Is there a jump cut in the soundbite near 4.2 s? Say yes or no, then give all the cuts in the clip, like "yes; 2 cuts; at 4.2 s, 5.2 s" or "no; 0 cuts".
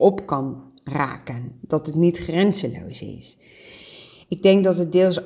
no; 0 cuts